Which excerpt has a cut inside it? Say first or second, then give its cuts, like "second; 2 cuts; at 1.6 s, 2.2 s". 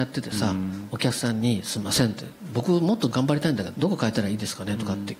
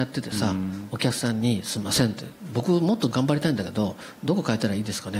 first; 1 cut; at 3.7 s